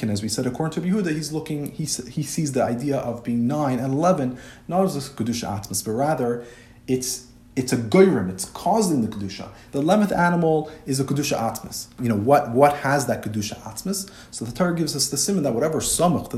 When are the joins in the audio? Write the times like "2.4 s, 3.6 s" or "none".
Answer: 9.7 s, 12.0 s